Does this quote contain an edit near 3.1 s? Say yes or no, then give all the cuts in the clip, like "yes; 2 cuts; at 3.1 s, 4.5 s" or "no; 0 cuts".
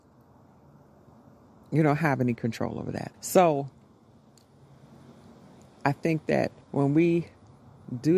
yes; 2 cuts; at 3.1 s, 6.6 s